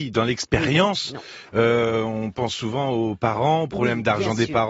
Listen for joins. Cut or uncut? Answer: uncut